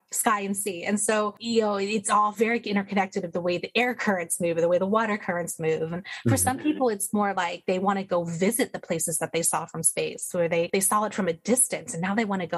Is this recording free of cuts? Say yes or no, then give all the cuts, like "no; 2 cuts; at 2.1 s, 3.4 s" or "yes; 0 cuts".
yes; 0 cuts